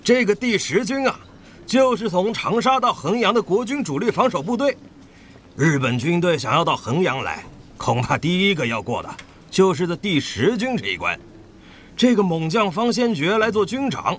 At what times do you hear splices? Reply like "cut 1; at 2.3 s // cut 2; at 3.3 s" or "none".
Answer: none